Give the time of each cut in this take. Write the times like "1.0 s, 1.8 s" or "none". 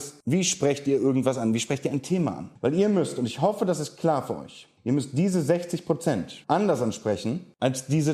none